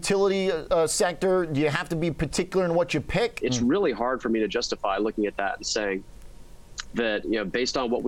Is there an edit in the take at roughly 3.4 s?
yes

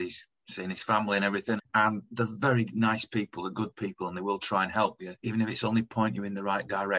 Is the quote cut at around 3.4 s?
no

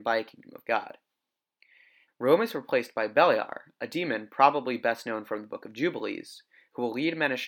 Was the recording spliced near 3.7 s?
no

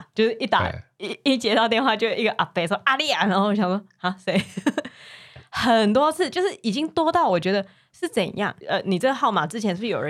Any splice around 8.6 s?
yes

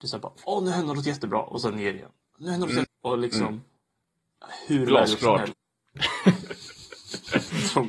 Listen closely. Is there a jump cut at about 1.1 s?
no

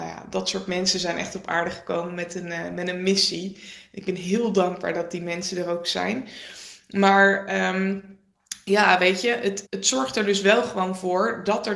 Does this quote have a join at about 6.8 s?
no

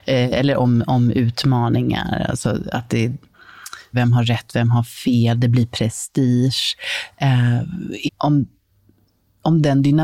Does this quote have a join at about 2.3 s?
no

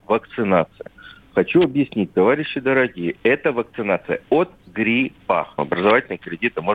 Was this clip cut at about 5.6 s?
yes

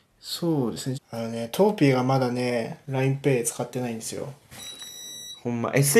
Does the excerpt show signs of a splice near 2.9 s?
no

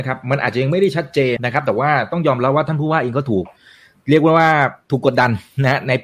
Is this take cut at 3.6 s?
no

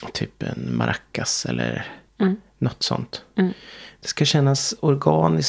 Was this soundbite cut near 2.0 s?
no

